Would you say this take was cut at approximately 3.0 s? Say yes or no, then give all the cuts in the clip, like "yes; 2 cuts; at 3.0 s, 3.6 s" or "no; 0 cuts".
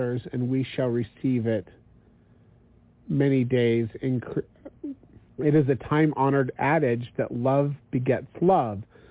no; 1 cut; at 5.3 s